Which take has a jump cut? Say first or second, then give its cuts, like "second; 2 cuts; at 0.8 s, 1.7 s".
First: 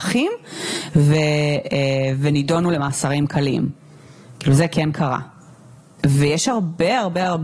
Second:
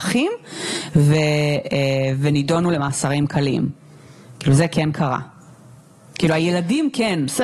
first; 1 cut; at 6.0 s